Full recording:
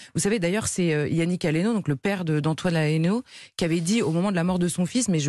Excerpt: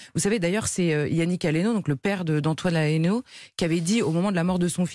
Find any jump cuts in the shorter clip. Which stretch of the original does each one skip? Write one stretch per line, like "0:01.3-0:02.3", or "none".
none